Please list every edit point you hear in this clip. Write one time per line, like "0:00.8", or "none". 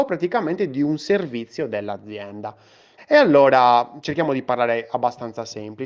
0:03.0